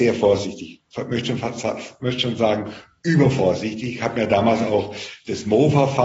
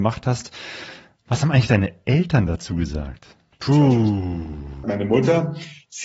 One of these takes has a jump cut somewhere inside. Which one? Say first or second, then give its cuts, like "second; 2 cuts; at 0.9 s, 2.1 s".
second; 2 cuts; at 3.5 s, 4.8 s